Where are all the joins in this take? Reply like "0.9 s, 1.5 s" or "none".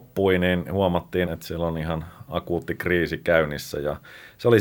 1.3 s